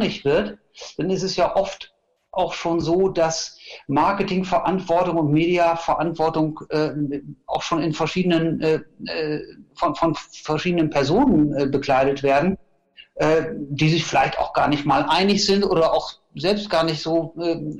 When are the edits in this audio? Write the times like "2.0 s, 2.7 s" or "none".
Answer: none